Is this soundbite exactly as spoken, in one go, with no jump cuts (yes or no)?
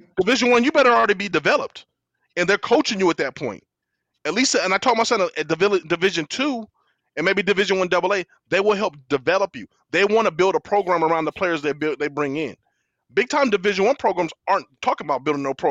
yes